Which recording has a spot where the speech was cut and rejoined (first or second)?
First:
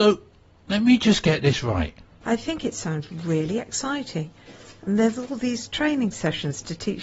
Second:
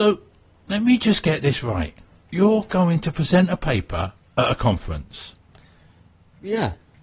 first